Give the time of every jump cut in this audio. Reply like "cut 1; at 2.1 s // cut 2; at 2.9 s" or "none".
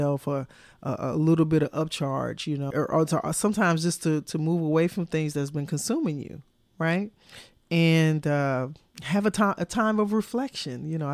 cut 1; at 2.7 s